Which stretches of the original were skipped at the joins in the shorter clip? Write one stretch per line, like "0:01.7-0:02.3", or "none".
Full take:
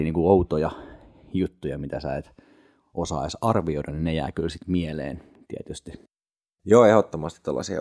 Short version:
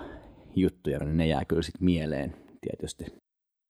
0:01.8-0:03.9